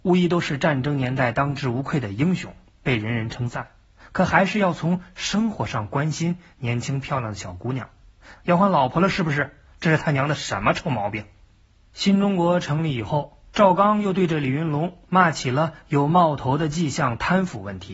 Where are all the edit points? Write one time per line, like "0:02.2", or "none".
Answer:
0:03.9
0:08.3